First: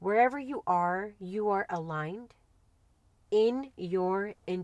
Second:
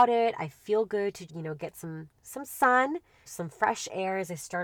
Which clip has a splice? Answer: second; 2 cuts; at 1.3 s, 3.3 s

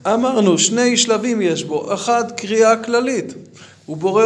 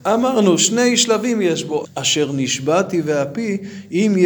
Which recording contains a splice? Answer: second; 1 cut; at 1.8 s

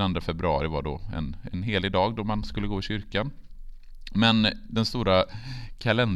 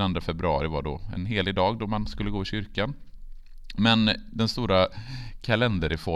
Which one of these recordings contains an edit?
second; 1 cut; at 1.1 s

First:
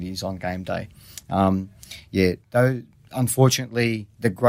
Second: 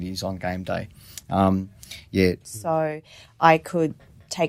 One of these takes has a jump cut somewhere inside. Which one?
second; 1 cut; at 2.4 s

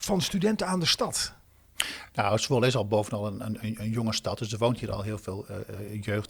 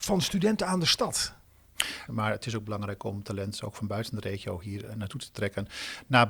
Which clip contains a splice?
second; 1 cut; at 2.1 s

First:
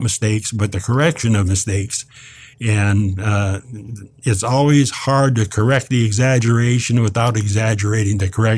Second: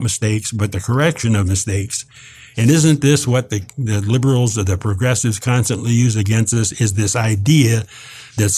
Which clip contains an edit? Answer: second; 1 cut; at 2.5 s

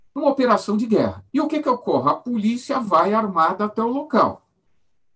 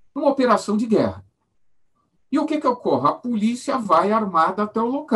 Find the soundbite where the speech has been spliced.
first; 1 cut; at 1.3 s

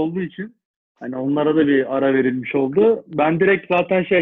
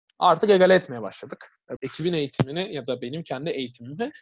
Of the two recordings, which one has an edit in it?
second; 1 cut; at 1.8 s

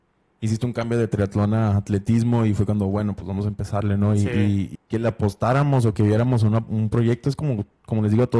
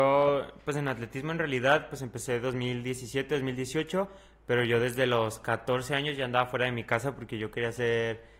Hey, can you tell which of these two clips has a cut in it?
first; 1 cut; at 4.8 s

